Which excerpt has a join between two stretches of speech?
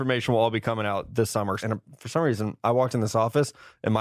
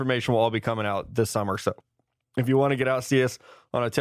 first; 1 cut; at 1.6 s

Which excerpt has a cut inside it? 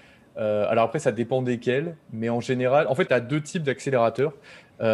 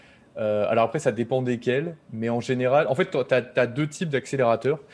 first; 1 cut; at 3.1 s

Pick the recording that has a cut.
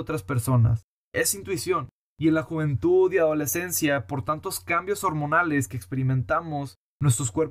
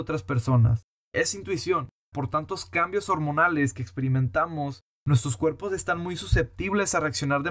second; 1 cut; at 2.1 s

